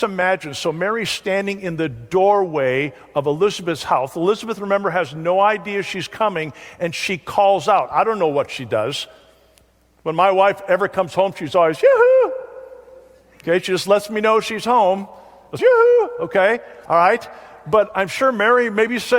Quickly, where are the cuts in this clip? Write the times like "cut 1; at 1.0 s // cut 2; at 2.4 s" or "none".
cut 1; at 15.6 s // cut 2; at 16.9 s